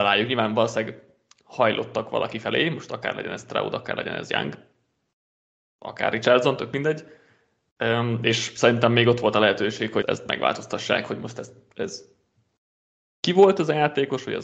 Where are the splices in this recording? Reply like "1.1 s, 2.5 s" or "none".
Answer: 10.0 s